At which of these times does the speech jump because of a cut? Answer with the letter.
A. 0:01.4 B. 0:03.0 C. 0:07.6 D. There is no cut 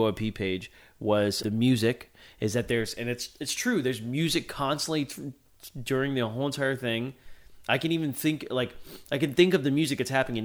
A